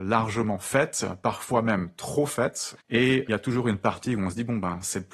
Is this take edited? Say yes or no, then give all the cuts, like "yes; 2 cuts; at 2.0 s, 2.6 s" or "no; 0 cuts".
yes; 1 cut; at 2.8 s